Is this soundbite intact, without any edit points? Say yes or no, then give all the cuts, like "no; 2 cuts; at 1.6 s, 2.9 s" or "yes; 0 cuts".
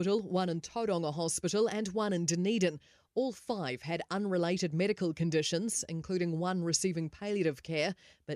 yes; 0 cuts